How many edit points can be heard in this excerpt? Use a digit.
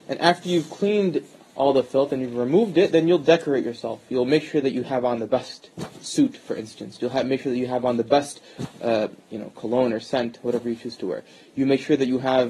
0